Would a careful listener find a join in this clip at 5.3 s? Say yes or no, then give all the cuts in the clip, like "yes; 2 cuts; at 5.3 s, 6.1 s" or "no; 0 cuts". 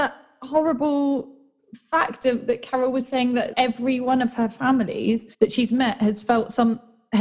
yes; 2 cuts; at 3.5 s, 5.3 s